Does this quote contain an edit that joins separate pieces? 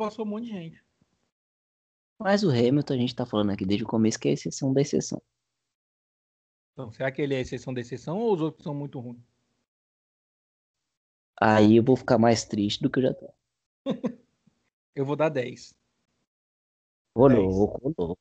yes; 1 cut; at 17.0 s

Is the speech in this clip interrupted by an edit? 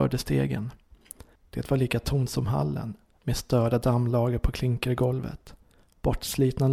yes; 1 cut; at 1.4 s

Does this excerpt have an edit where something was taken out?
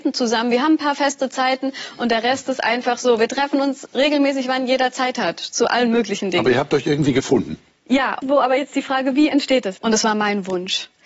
yes; 2 cuts; at 8.2 s, 9.8 s

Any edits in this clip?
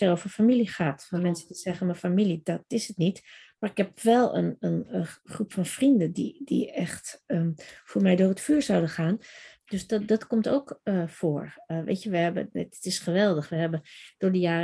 yes; 1 cut; at 9.6 s

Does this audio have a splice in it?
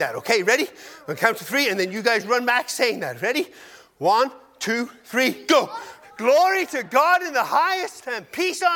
yes; 1 cut; at 6.0 s

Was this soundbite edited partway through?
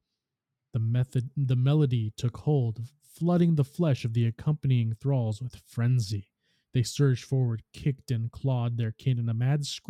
no; 0 cuts

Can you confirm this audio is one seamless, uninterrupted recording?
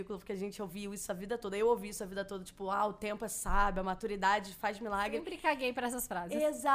yes; 0 cuts

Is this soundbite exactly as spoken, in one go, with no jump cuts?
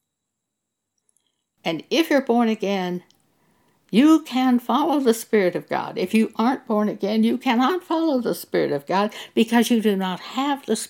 yes; 0 cuts

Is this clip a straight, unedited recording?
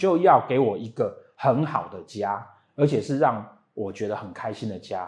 yes; 0 cuts

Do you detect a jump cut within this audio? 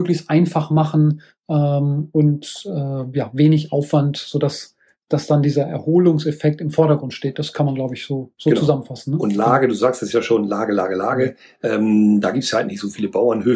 no; 0 cuts

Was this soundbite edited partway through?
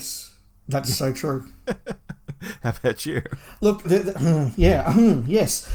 yes; 1 cut; at 3.8 s

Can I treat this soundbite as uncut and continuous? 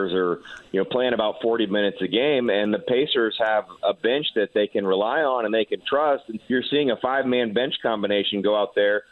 no; 1 cut; at 6.4 s

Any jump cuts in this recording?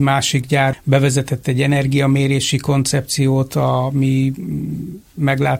no; 0 cuts

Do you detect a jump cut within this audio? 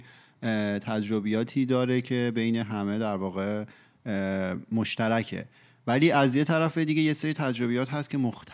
no; 0 cuts

